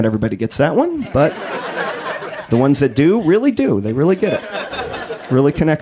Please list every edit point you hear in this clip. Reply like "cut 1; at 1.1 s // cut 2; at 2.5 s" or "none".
none

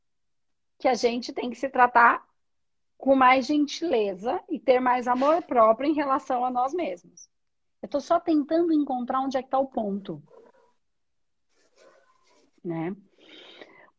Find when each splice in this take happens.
none

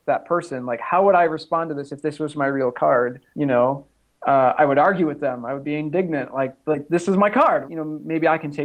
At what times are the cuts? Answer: cut 1; at 3.3 s // cut 2; at 7.6 s

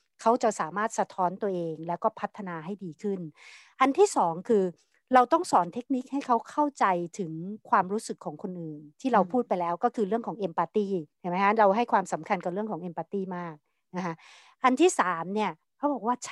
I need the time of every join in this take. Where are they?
cut 1; at 11.1 s

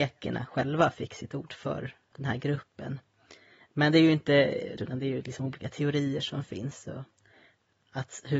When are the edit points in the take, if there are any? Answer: cut 1; at 2.1 s // cut 2; at 4.8 s

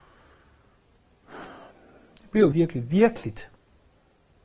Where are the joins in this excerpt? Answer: cut 1; at 2.5 s

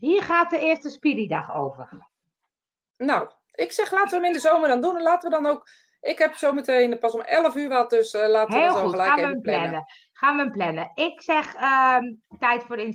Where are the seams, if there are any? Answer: none

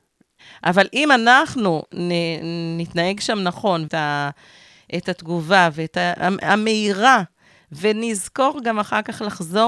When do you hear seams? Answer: cut 1; at 3.9 s

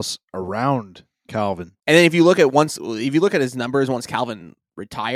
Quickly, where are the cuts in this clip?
cut 1; at 1.8 s

